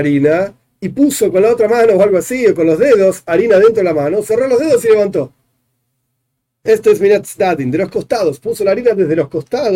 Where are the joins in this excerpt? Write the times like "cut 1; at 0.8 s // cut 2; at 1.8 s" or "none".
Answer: none